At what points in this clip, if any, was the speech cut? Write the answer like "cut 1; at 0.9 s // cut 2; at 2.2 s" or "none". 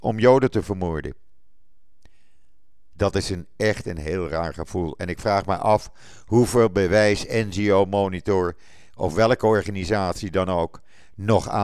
cut 1; at 2.9 s